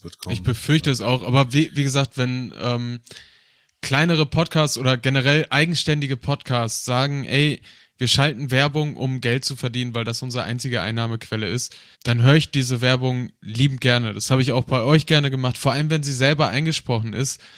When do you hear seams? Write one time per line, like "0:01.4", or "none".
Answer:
0:11.9

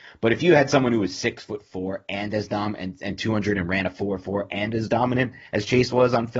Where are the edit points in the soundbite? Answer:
none

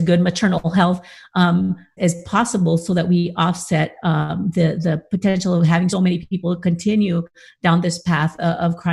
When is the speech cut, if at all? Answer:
0:02.0
0:05.9

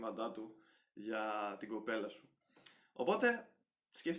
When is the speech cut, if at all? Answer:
none

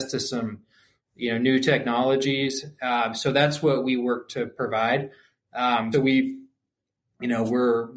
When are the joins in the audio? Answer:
0:05.9

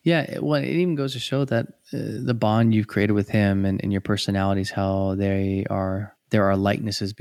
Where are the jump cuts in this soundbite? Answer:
none

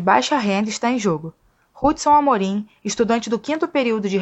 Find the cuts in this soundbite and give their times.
none

